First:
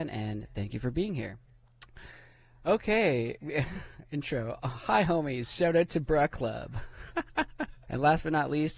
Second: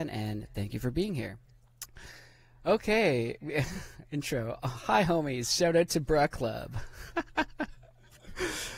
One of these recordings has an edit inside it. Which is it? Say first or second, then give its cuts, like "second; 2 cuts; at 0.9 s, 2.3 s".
first; 1 cut; at 7.8 s